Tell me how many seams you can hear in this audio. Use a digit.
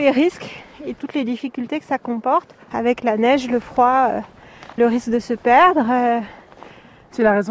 2